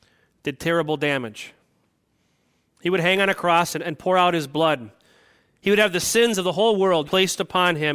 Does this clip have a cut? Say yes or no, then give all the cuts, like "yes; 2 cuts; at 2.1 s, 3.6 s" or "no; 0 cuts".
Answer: yes; 1 cut; at 7.0 s